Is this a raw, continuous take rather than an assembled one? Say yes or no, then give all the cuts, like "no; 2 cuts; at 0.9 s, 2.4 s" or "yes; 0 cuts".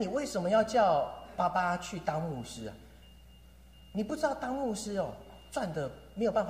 yes; 0 cuts